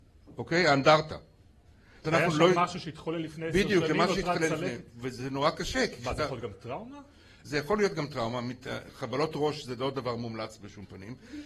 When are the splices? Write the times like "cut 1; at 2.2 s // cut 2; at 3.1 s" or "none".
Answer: cut 1; at 2.0 s